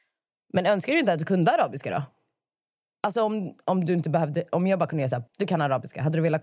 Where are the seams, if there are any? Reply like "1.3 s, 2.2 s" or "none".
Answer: 5.3 s